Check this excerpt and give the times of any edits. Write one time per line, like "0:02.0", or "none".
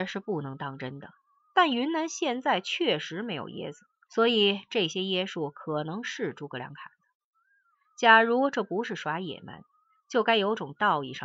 0:04.1